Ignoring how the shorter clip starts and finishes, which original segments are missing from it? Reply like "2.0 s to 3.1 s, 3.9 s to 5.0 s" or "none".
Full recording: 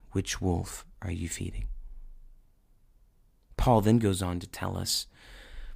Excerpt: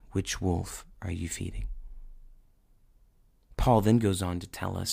none

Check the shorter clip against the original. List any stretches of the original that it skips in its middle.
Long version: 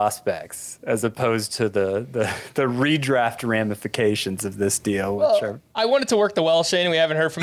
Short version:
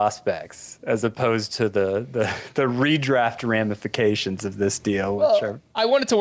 none

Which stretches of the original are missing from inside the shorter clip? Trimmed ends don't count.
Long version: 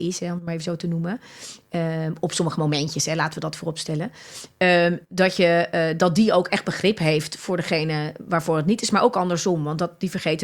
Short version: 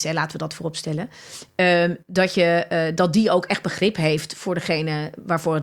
none

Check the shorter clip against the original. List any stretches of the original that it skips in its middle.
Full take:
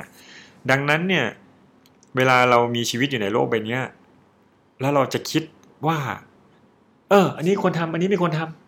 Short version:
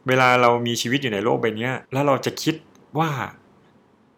3.9 s to 4.7 s

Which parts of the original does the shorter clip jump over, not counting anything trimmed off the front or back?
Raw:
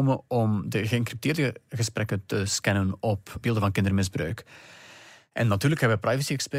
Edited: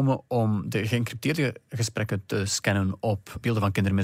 none

